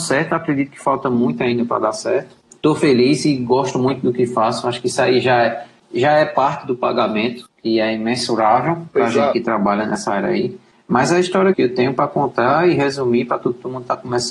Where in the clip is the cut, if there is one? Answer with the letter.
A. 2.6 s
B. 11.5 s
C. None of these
B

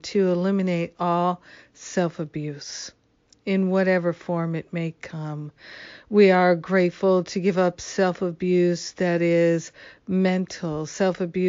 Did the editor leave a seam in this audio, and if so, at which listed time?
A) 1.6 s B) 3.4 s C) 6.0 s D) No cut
D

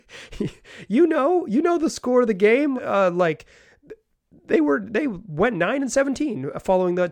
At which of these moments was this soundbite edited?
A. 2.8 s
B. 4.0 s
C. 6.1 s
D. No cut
A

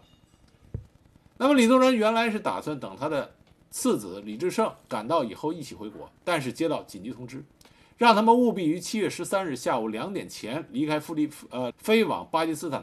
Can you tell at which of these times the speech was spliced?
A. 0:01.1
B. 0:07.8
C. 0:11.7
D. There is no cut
C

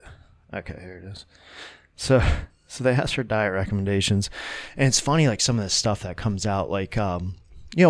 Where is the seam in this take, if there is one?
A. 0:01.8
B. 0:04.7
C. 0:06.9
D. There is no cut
D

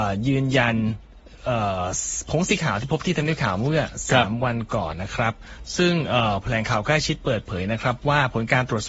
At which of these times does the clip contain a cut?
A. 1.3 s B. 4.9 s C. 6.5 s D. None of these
B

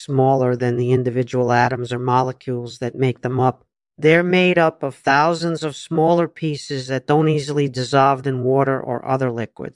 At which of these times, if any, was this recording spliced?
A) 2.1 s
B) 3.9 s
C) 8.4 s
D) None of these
B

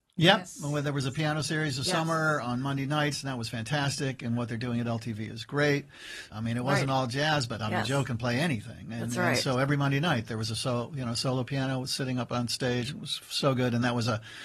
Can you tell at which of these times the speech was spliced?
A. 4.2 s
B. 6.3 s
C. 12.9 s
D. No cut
B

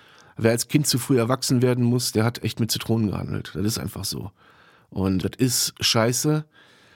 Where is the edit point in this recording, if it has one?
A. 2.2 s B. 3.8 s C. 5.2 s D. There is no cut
C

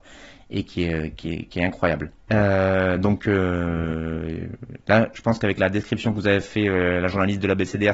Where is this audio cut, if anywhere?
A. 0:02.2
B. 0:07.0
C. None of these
A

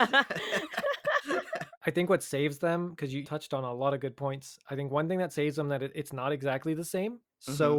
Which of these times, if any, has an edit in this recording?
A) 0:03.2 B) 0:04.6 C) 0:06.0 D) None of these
A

